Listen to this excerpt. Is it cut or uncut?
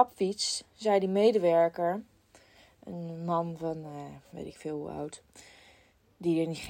uncut